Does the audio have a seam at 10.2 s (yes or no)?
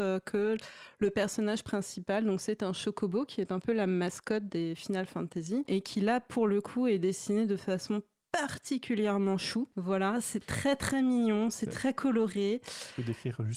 no